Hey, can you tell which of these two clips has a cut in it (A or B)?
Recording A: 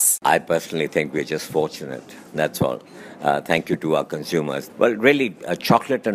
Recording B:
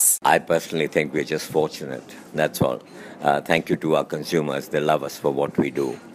A